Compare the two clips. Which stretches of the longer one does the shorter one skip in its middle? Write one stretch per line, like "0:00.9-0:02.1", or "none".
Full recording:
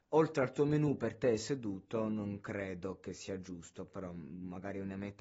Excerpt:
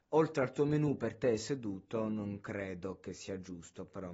none

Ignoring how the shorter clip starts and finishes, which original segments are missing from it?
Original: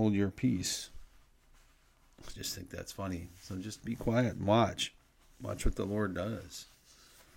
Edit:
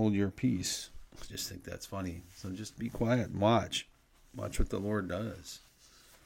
0:01.1-0:02.2

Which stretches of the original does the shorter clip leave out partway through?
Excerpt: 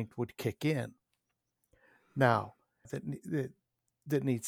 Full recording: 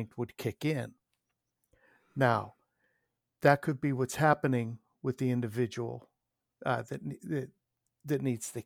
0:02.8-0:06.8

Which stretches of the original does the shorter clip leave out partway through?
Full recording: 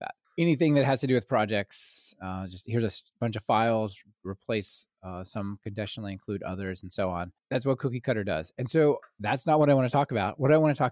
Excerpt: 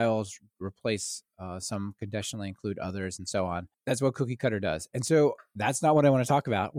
none

